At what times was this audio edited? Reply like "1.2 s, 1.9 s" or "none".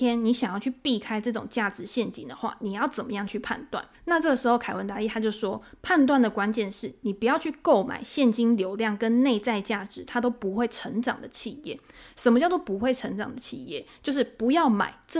3.9 s